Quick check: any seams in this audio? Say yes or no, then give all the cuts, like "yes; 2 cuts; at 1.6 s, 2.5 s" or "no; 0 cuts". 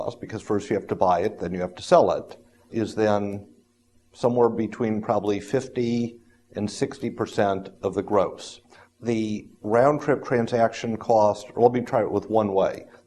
yes; 2 cuts; at 2.7 s, 8.9 s